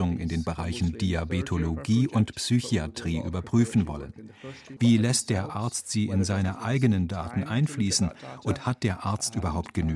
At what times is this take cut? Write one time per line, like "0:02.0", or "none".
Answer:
0:04.8